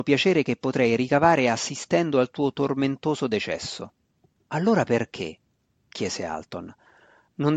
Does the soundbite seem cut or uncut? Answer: cut